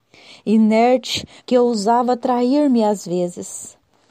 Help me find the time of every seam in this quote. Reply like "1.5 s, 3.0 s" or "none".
1.4 s